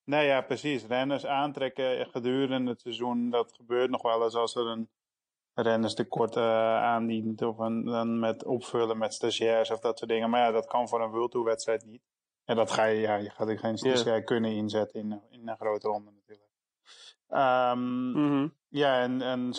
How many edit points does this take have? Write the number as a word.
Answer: zero